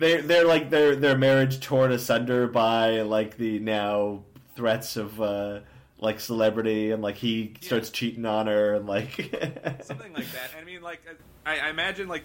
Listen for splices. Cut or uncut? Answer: uncut